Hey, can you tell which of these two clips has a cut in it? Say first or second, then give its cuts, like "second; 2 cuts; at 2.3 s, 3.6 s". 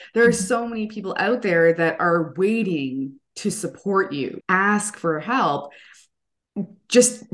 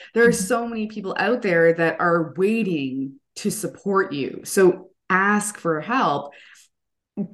first; 1 cut; at 4.4 s